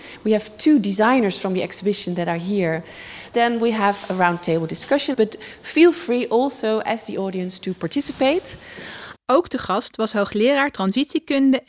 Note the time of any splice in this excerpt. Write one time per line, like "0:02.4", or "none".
0:05.1
0:09.1